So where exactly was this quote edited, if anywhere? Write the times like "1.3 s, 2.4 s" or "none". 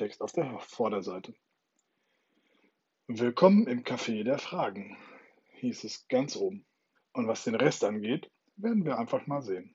7.0 s

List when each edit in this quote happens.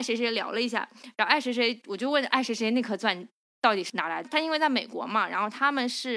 3.9 s

